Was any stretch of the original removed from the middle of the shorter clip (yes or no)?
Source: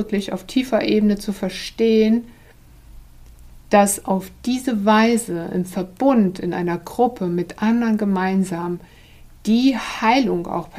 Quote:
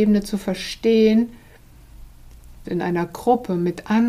yes